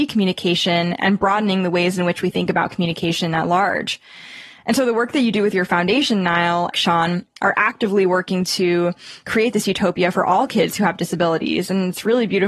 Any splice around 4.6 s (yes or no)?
no